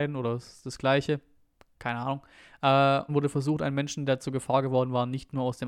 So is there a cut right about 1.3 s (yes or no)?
no